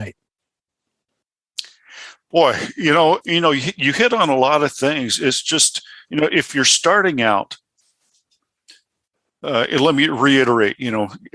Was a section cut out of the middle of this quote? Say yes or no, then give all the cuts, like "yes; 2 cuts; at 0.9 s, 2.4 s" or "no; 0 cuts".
yes; 1 cut; at 3.2 s